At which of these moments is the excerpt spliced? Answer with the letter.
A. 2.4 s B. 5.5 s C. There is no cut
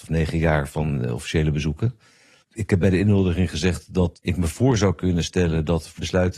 A